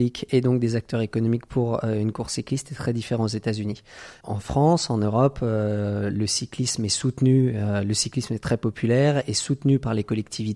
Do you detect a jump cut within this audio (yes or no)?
no